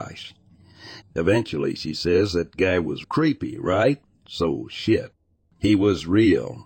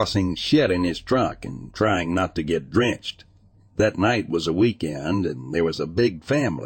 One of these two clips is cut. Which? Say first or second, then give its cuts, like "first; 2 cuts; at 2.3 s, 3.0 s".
first; 2 cuts; at 1.0 s, 3.0 s